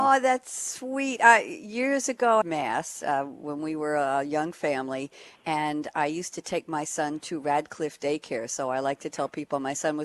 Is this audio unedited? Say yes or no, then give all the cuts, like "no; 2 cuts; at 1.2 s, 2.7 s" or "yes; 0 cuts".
no; 1 cut; at 2.4 s